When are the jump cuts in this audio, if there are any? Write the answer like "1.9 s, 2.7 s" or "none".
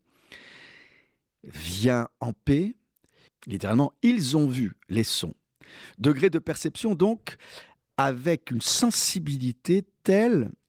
3.3 s